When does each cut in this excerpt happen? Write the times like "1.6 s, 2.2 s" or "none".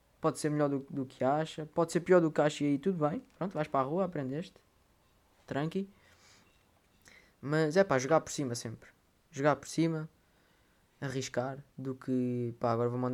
none